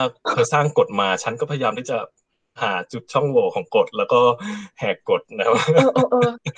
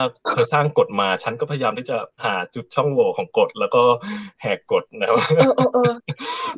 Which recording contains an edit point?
second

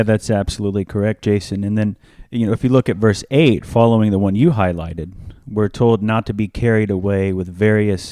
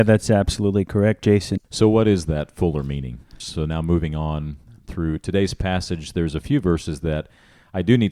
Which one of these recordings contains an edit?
second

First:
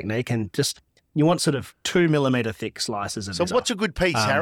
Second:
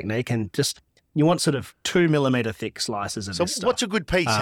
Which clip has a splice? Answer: first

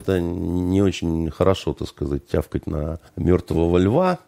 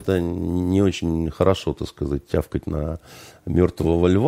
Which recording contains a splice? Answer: first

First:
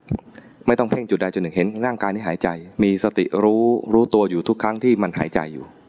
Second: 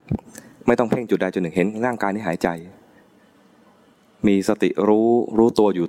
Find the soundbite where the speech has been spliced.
first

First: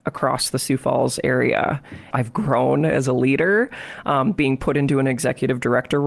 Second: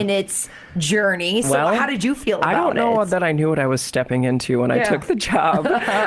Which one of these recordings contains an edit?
first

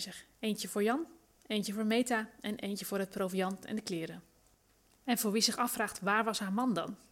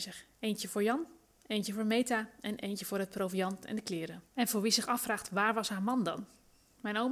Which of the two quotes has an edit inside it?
second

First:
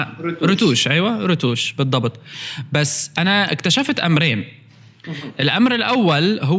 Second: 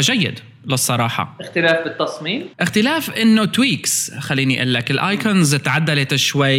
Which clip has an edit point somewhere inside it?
second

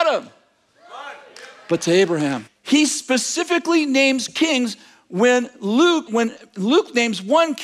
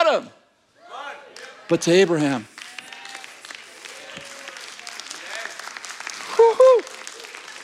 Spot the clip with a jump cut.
first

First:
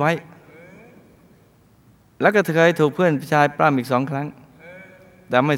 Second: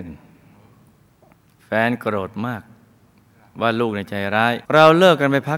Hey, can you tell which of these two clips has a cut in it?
second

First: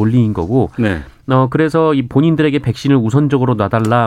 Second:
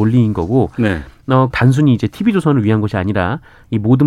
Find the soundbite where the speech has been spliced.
second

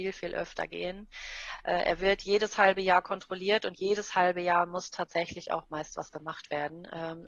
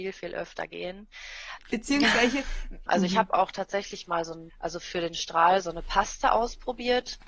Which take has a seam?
second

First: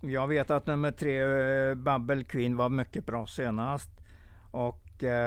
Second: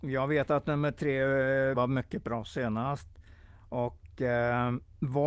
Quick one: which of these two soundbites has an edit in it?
second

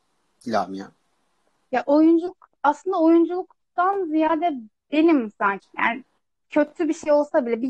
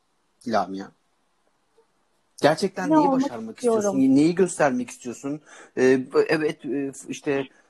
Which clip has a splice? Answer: first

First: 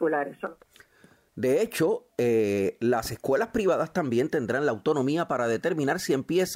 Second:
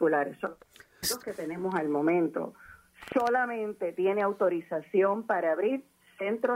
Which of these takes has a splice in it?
second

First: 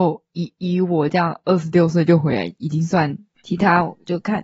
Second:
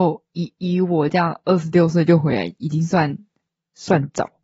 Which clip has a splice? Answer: first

